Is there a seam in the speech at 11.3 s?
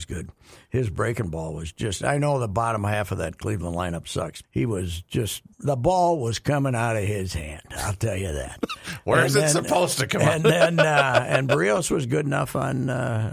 no; 2 cuts; at 4.4 s, 5.5 s

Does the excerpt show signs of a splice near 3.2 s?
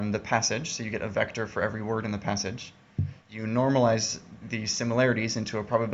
yes; 2 cuts; at 3.2 s, 4.4 s

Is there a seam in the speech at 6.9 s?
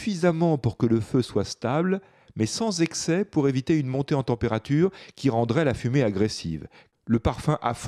yes; 1 cut; at 6.9 s

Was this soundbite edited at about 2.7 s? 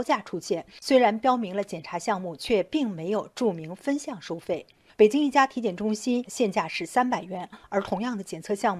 no; 2 cuts; at 4.9 s, 6.2 s

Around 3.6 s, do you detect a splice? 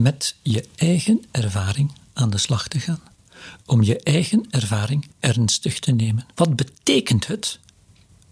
no; 2 cuts; at 5.1 s, 6.3 s

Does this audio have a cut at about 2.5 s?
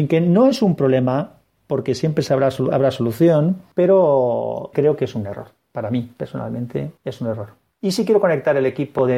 no; 1 cut; at 7.0 s

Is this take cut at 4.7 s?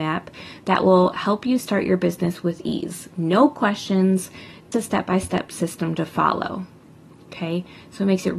yes; 1 cut; at 4.7 s

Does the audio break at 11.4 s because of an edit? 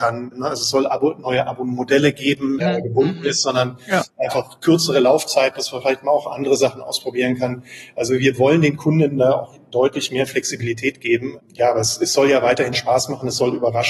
no; 1 cut; at 2.6 s

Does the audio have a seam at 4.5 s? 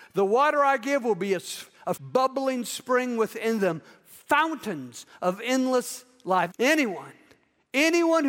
no; 2 cuts; at 2.0 s, 6.5 s

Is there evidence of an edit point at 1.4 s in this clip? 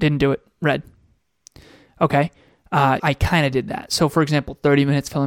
no; 1 cut; at 3.0 s

